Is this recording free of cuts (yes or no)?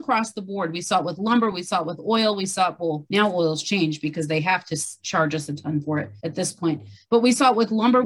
yes